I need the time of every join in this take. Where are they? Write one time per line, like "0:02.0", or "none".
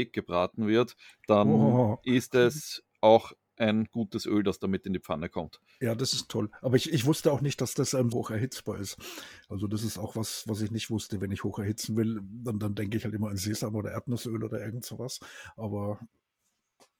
0:08.1